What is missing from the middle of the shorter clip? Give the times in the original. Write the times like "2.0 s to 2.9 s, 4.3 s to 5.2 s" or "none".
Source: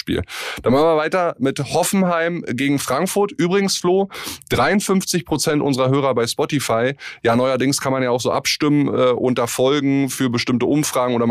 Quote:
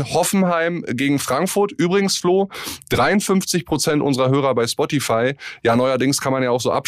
none